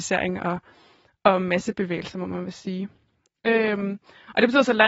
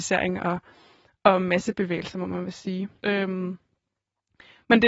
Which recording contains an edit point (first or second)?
second